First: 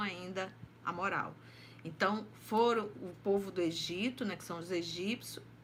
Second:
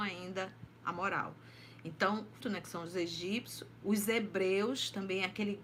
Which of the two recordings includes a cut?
second; 2 cuts; at 2.4 s, 3.8 s

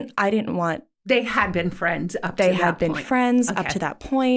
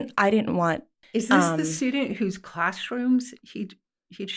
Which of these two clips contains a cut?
second; 1 cut; at 1.0 s

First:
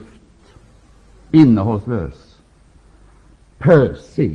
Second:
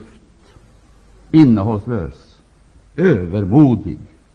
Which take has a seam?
second; 1 cut; at 2.8 s

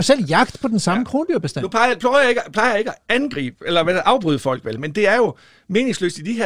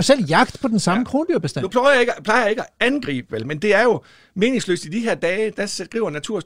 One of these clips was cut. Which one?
second; 2 cuts; at 1.7 s, 3.3 s

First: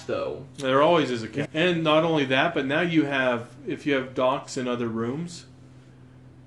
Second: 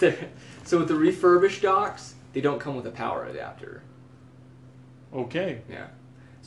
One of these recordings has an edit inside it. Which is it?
first; 1 cut; at 1.4 s

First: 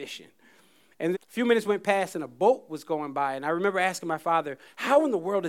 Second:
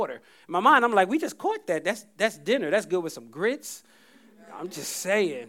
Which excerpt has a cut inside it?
first; 1 cut; at 1.1 s

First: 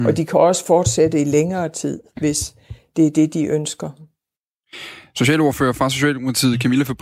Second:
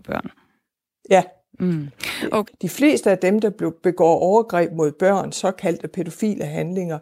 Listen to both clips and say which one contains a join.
second; 1 cut; at 2.5 s

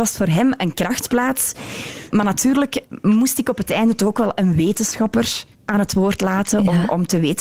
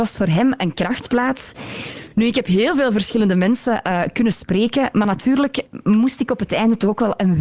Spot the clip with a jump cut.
first; 2 cuts; at 2.1 s, 5.5 s

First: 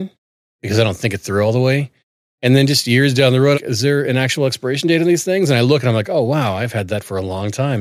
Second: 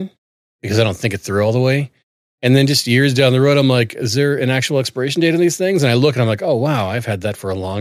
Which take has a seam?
first; 1 cut; at 3.5 s

